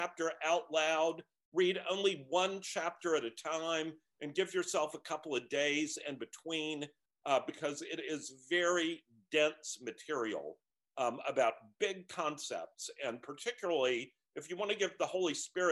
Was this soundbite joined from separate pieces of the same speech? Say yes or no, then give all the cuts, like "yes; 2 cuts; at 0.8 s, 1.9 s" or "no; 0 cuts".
no; 0 cuts